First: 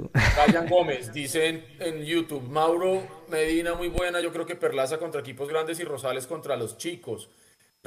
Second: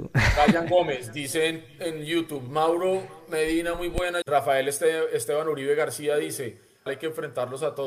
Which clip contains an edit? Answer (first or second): second